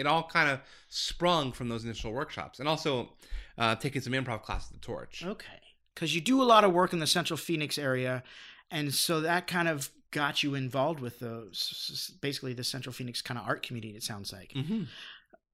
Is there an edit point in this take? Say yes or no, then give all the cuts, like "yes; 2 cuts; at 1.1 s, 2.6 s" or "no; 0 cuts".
no; 0 cuts